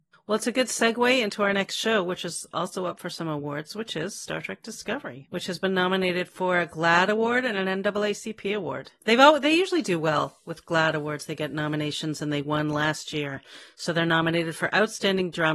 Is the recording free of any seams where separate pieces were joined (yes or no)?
yes